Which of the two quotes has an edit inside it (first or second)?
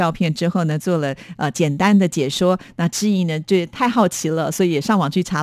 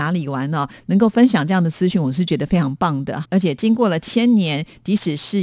second